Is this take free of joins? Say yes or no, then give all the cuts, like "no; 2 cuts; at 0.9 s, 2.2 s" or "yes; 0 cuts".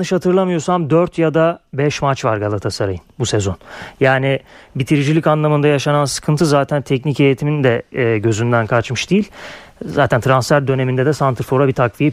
yes; 0 cuts